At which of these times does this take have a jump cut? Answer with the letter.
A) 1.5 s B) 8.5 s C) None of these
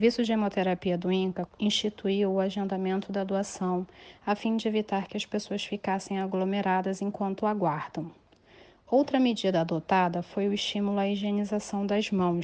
A